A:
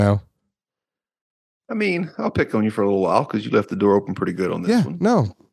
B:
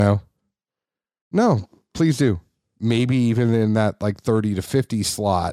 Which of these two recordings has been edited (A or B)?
B